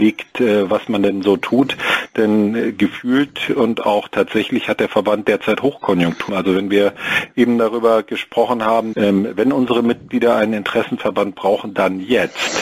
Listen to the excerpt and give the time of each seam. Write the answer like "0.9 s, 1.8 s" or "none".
6.3 s, 8.9 s